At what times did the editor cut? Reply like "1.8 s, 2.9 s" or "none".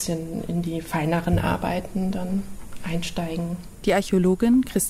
3.8 s